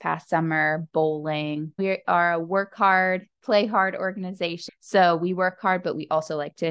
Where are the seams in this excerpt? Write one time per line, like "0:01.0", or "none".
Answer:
0:01.8
0:04.7